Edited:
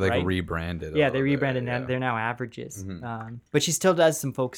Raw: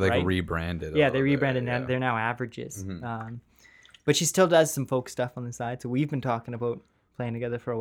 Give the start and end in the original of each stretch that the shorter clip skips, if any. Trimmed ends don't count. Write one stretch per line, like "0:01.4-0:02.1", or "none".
0:03.5-0:04.0